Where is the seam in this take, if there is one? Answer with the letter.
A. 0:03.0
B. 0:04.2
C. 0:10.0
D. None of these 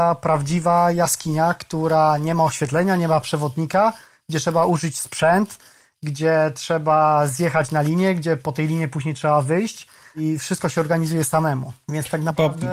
D